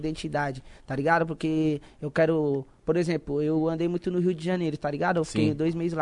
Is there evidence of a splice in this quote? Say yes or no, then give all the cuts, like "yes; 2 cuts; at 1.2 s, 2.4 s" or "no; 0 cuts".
no; 0 cuts